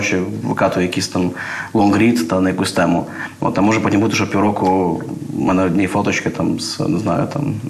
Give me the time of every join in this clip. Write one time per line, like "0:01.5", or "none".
none